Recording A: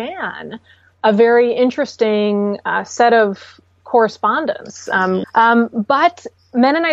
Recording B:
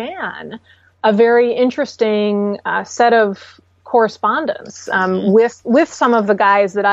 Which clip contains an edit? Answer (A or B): A